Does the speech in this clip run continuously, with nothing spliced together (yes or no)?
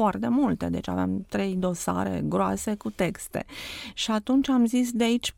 yes